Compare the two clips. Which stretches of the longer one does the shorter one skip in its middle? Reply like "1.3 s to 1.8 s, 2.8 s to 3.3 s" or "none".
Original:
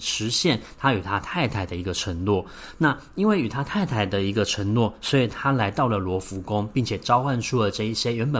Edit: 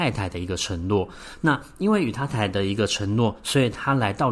3.6 s to 3.9 s